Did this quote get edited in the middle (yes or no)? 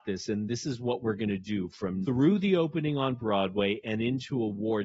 yes